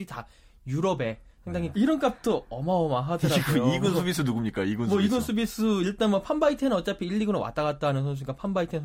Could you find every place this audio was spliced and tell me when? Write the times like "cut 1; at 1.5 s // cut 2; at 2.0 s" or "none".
cut 1; at 1.7 s